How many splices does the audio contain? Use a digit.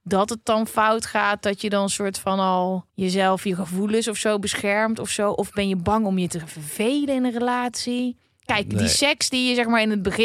1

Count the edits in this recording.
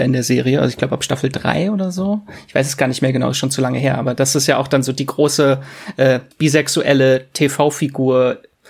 1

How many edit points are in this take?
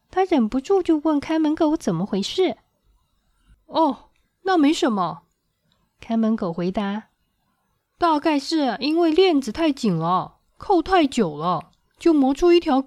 0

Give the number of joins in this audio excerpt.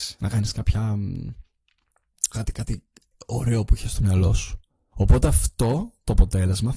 2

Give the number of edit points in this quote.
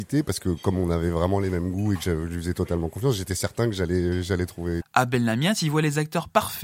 1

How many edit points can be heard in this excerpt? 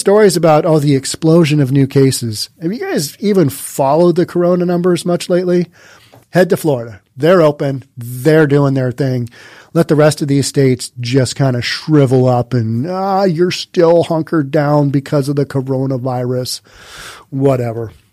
1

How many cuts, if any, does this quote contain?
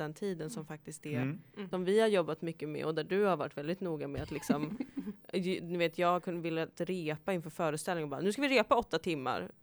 1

